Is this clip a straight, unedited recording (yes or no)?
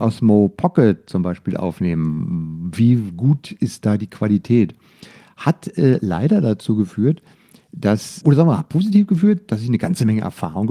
no